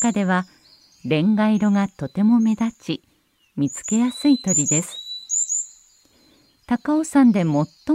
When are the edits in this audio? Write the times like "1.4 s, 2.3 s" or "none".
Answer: none